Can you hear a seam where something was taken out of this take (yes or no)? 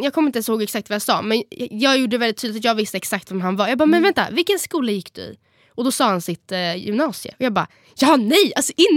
no